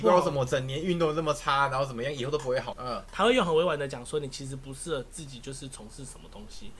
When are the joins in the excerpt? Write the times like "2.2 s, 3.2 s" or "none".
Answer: 2.7 s